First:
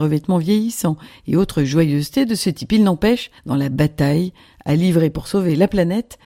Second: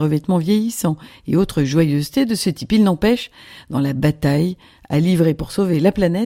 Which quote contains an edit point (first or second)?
first